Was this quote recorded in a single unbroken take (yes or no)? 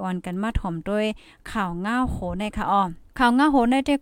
no